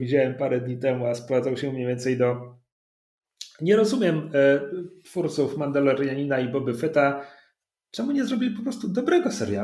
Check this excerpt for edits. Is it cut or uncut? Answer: uncut